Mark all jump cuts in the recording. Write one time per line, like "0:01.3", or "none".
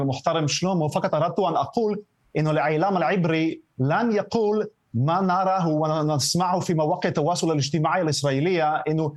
none

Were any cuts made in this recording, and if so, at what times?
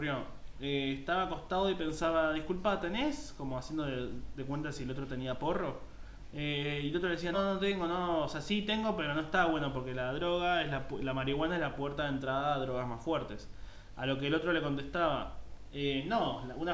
0:07.3

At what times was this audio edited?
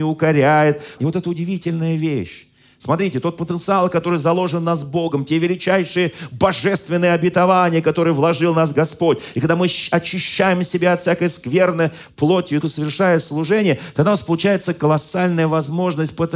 0:01.0
0:12.6

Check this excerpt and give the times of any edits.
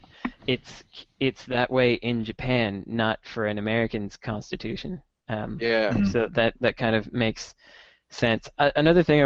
none

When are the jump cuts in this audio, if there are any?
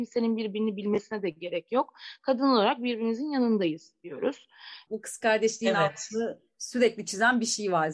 0:04.9

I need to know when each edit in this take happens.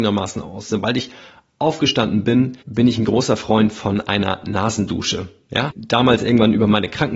0:02.6
0:05.7

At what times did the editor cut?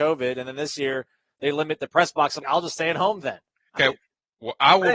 0:02.4
0:03.8

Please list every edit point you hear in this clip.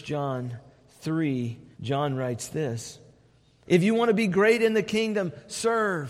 0:01.7
0:03.6

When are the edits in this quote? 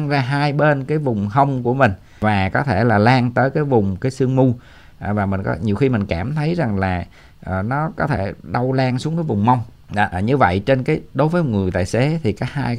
0:10.1

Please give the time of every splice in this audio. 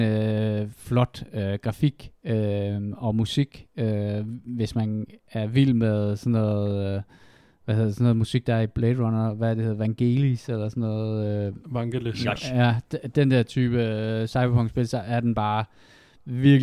none

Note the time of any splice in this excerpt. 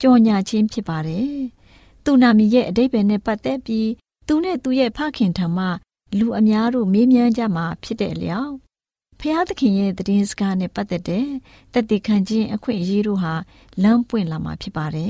none

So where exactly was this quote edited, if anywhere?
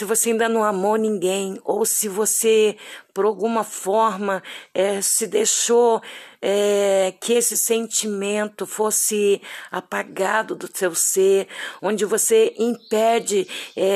0:11.8

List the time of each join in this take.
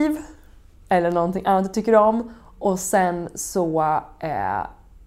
none

